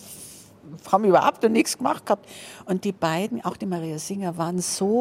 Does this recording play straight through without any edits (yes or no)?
yes